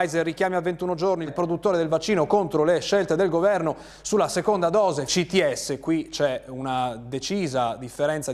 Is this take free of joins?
no; 2 cuts; at 1.3 s, 5.1 s

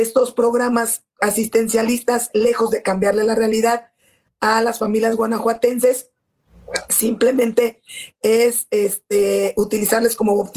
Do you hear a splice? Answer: no; 0 cuts

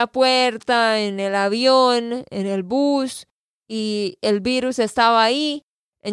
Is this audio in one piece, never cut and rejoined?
yes; 0 cuts

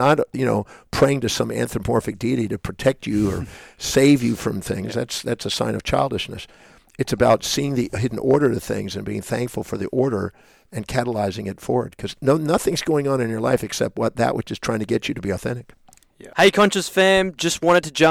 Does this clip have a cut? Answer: no; 0 cuts

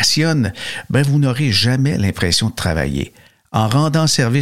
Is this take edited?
no; 0 cuts

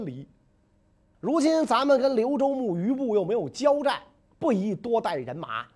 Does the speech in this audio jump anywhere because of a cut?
yes; 1 cut; at 1.0 s

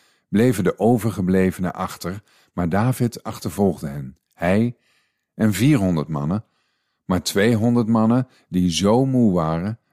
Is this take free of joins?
yes; 0 cuts

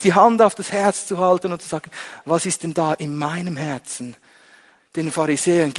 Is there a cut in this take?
yes; 1 cut; at 4.8 s

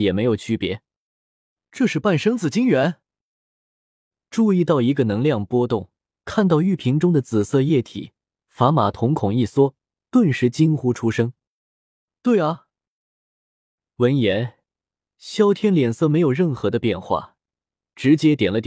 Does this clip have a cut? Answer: yes; 1 cut; at 6.1 s

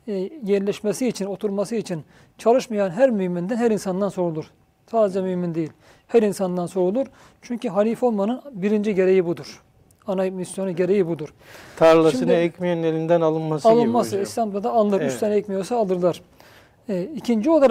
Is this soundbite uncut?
yes; 0 cuts

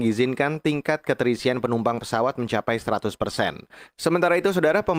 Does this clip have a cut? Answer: yes; 1 cut; at 3.9 s

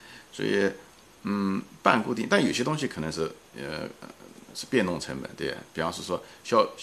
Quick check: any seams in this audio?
no; 0 cuts

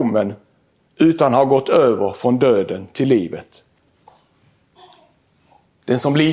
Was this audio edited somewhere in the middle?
no; 0 cuts

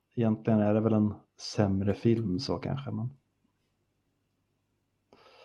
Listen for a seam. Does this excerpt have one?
no; 0 cuts

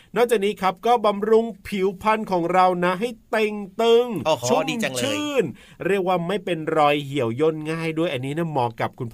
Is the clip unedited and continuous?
no; 1 cut; at 4.4 s

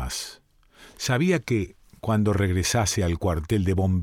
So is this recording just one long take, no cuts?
no; 1 cut; at 0.9 s

